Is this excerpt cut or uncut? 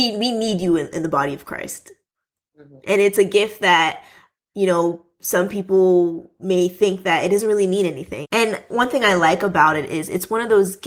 cut